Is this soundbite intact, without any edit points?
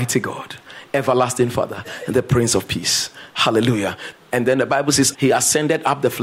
no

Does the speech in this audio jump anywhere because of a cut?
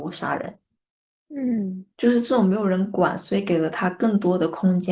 no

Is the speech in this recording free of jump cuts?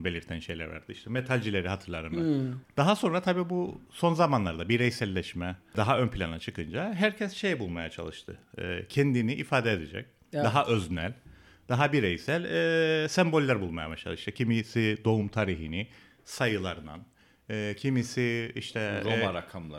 no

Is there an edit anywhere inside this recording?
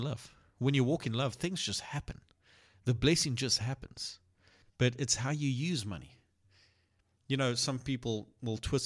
yes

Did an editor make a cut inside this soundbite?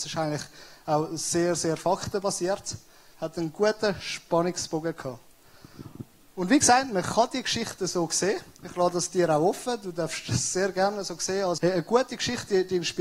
yes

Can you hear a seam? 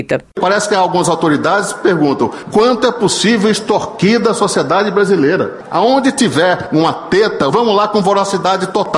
yes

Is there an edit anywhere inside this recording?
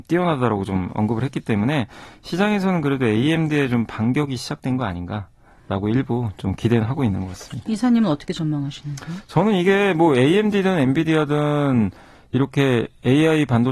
no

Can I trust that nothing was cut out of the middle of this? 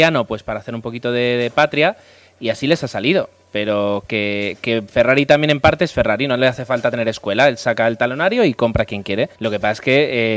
no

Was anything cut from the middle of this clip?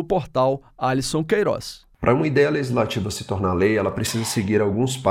yes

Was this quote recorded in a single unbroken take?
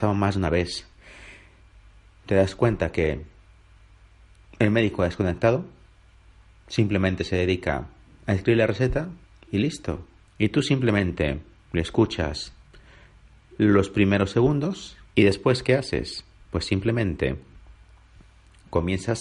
no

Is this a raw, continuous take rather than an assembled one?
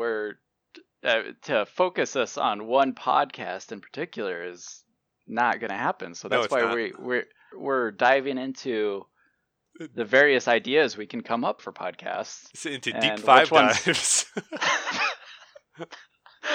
no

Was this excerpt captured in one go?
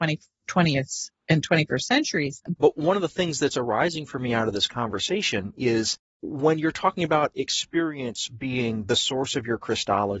no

